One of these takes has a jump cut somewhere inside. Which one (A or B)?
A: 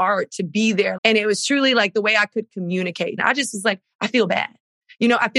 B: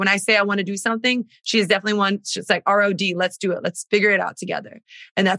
A